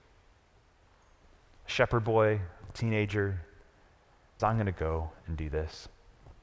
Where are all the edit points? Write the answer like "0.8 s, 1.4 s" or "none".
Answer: 4.4 s